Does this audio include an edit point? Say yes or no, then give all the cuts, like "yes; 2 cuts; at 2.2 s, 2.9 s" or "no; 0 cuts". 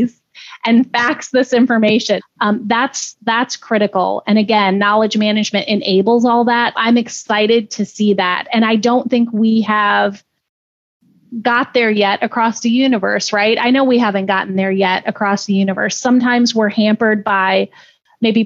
yes; 2 cuts; at 2.2 s, 6.7 s